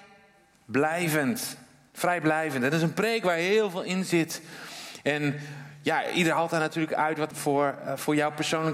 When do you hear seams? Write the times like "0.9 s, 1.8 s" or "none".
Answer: 7.3 s